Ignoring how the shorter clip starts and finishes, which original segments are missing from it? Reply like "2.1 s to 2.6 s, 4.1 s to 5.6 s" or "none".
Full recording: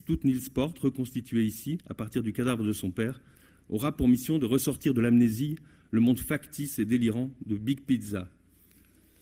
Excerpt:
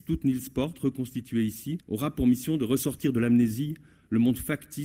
1.8 s to 3.6 s